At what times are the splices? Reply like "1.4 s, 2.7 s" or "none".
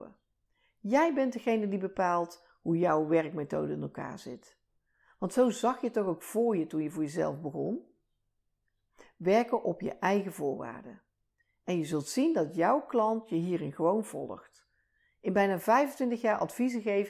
none